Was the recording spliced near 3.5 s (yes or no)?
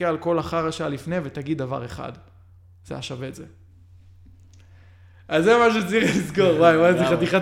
no